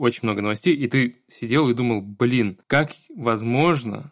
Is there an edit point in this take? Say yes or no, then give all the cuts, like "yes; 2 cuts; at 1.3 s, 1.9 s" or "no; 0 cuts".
yes; 1 cut; at 2.6 s